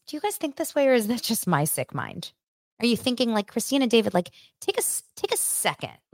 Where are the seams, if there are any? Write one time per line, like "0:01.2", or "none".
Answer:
none